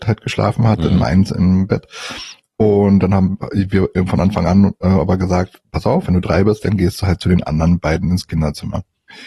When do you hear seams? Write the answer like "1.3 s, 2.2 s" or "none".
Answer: none

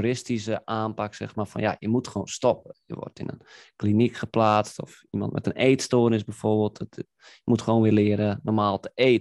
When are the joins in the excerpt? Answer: none

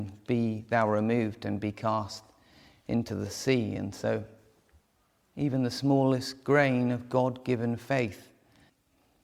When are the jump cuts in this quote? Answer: none

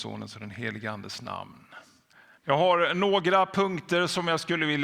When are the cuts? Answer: 2.4 s

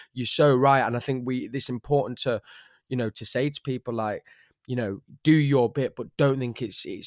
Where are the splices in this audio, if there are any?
none

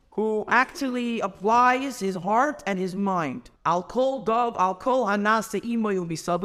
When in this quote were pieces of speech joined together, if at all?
3.6 s

